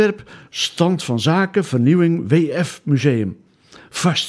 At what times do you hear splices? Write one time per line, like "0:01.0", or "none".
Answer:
none

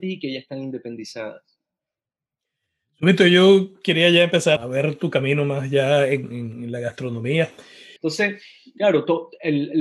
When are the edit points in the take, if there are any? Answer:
0:04.6
0:08.0

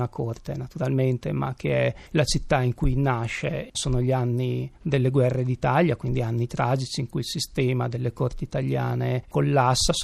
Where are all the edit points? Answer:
0:03.7

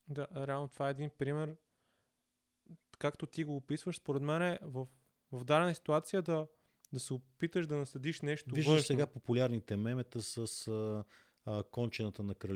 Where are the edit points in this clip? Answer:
none

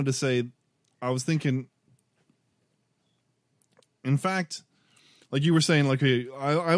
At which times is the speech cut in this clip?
none

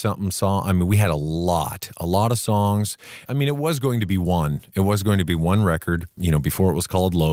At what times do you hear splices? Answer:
0:03.2

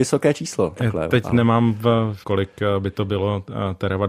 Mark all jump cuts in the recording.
0:02.2

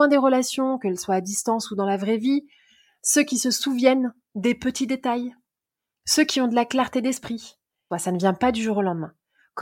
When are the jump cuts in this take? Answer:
0:07.9

